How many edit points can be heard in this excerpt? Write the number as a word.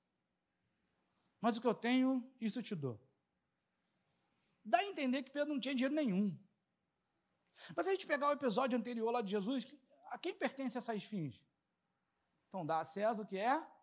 zero